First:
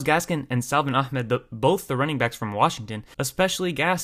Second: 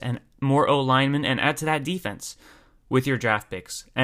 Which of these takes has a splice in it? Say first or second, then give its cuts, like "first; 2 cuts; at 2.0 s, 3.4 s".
first; 1 cut; at 3.1 s